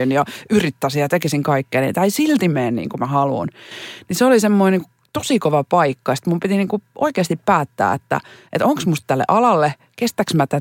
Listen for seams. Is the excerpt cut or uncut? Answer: uncut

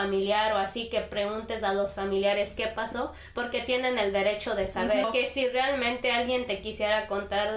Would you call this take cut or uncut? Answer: cut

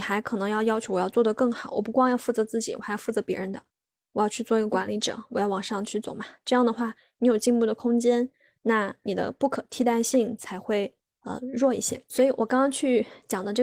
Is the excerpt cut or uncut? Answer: uncut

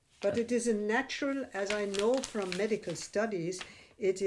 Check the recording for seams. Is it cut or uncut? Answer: uncut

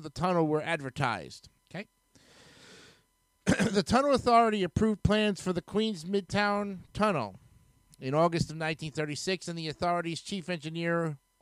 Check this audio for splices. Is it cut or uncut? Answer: cut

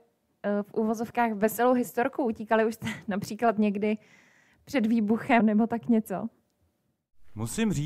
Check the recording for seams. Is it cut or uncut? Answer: cut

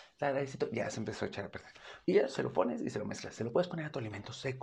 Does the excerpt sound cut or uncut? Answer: cut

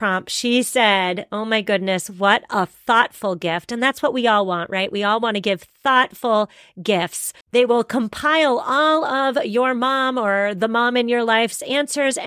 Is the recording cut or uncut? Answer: cut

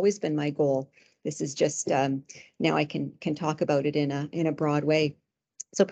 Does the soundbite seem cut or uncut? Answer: uncut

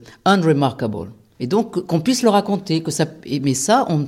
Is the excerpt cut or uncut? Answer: uncut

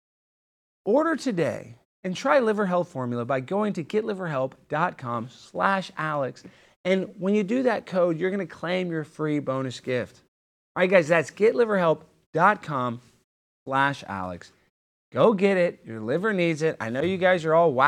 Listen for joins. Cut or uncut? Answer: uncut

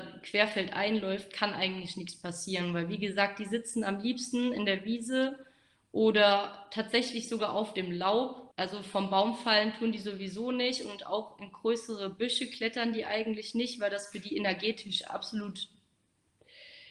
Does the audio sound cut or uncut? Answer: cut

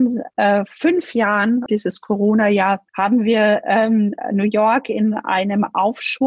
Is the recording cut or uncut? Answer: cut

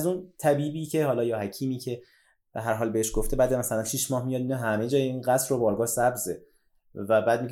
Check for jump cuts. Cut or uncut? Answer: uncut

